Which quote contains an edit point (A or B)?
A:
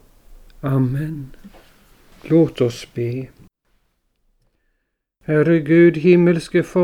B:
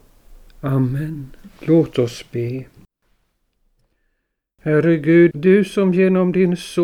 B